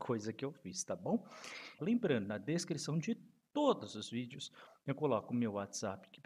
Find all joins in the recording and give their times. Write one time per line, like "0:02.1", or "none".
0:01.8